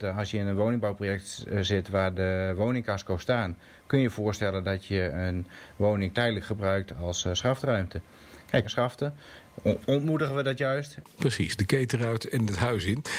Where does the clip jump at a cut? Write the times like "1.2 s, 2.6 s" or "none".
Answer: 8.6 s, 11.0 s